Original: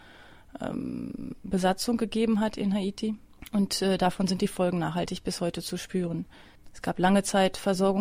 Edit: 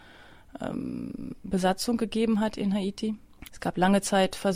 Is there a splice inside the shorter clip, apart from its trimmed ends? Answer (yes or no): yes